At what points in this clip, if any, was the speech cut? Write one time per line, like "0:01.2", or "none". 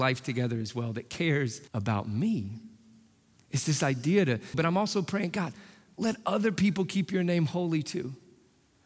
0:01.7
0:04.5